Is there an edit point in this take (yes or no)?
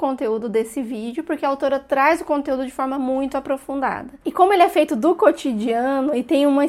yes